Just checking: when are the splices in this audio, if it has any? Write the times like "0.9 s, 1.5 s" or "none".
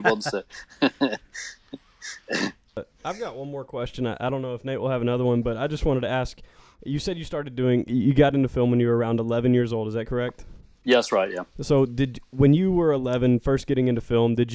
none